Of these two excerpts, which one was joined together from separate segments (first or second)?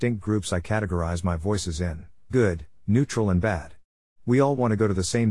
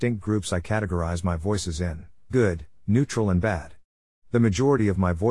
first